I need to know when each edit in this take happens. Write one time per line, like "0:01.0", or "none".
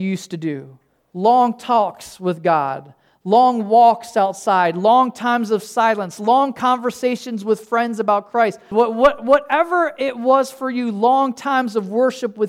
0:08.7